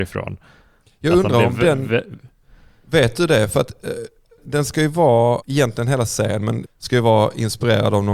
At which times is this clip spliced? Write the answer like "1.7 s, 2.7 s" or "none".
4.4 s, 5.4 s, 6.7 s